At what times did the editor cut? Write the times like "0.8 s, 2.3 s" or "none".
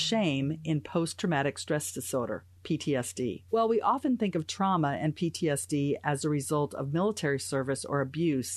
3.5 s